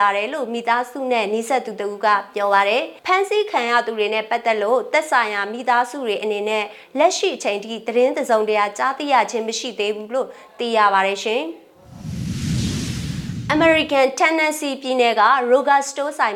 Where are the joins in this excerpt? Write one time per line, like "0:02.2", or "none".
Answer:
0:03.0